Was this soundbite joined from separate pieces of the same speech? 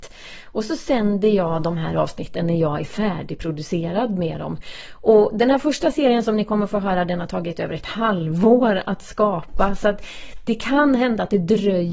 no; 0 cuts

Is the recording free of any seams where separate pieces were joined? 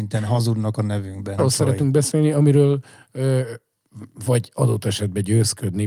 no; 1 cut; at 1.4 s

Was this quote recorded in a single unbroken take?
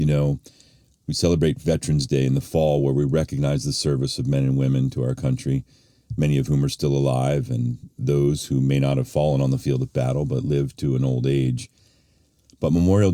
yes; 0 cuts

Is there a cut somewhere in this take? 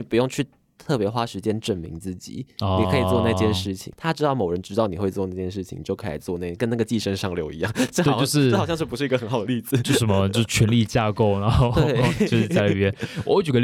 no; 0 cuts

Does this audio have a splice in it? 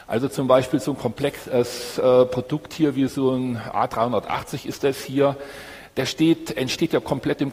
no; 0 cuts

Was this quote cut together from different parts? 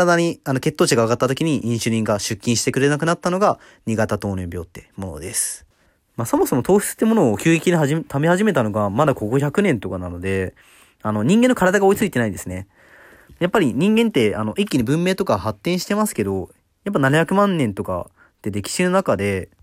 no; 0 cuts

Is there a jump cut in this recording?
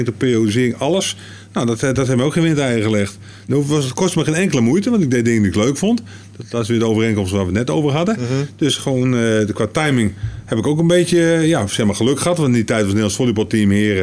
yes; 1 cut; at 3.5 s

